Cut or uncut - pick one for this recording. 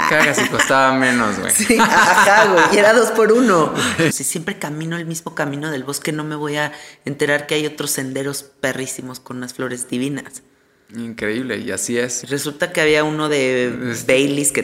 cut